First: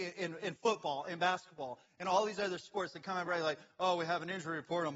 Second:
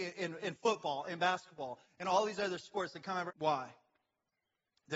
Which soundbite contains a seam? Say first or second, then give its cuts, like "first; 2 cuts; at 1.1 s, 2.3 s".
second; 1 cut; at 3.3 s